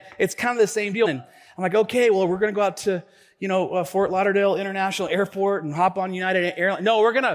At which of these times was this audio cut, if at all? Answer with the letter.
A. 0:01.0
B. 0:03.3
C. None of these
A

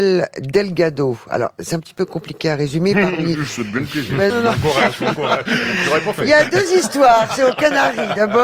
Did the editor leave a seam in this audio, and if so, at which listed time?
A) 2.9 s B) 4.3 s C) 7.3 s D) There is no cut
B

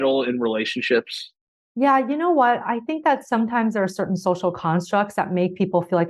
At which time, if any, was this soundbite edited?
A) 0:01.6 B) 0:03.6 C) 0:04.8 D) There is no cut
A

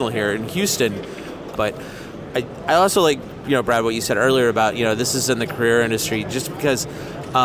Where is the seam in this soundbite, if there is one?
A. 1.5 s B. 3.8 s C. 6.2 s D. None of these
A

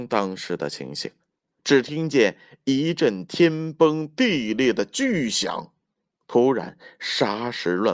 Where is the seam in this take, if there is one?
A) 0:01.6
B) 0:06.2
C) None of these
A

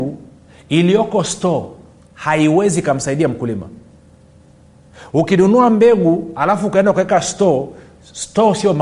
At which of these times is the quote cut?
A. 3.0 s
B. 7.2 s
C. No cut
C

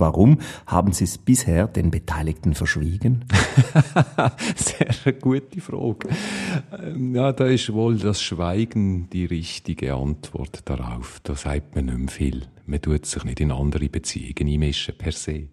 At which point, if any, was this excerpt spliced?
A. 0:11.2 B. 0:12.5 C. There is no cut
C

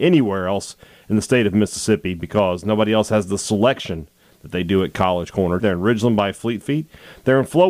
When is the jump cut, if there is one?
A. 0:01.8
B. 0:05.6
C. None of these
B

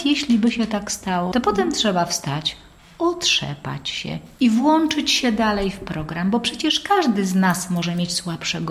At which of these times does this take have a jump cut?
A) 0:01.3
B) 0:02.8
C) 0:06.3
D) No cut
A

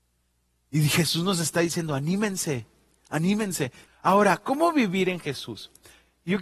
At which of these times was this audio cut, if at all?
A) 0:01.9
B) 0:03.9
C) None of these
B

